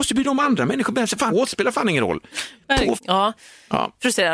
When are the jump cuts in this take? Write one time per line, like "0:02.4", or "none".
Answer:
0:01.3
0:03.0

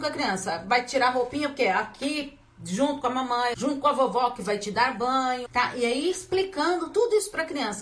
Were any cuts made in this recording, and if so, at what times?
0:03.5
0:05.5

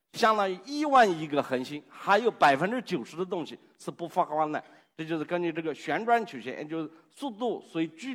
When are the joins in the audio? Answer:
none

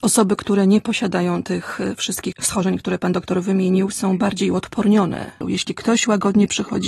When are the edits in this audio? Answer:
0:05.4

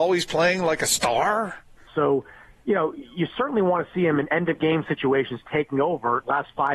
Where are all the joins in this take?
0:01.9

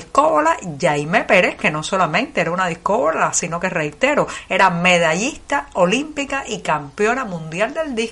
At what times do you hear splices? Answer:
none

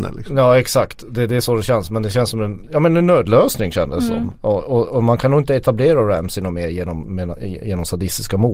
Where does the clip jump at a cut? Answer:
none

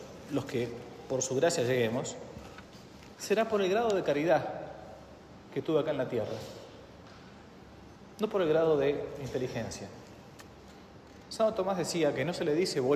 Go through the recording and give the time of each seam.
0:03.1

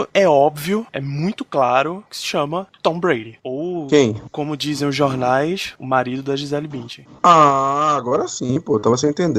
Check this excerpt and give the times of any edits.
none

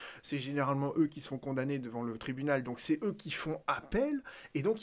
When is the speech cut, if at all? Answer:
none

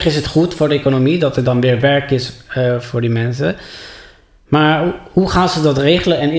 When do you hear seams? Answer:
none

